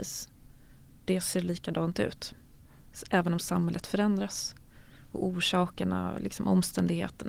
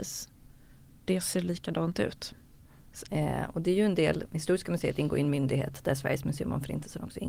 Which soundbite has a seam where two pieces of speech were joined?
second; 1 cut; at 3.1 s

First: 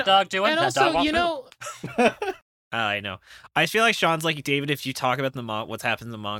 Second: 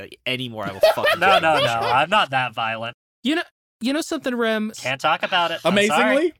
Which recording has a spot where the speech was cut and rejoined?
second; 1 cut; at 4.7 s

